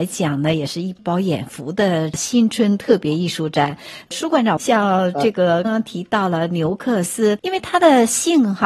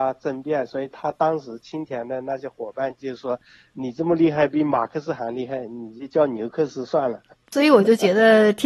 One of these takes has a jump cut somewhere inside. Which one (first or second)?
first